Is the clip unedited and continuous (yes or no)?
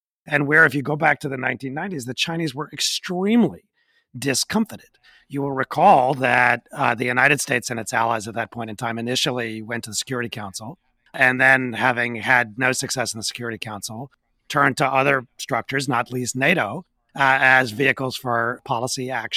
yes